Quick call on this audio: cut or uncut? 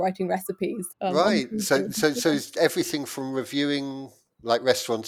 cut